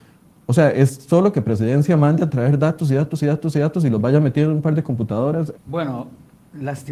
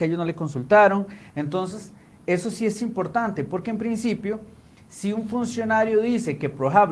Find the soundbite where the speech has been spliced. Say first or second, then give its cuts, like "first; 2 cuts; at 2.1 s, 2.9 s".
first; 1 cut; at 5.6 s